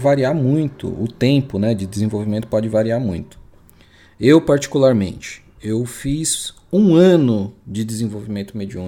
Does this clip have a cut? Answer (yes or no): no